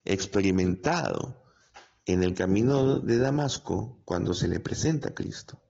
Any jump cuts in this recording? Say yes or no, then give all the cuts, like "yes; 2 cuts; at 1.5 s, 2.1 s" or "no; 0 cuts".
no; 0 cuts